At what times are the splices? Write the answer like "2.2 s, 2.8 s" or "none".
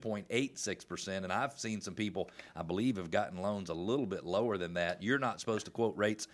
none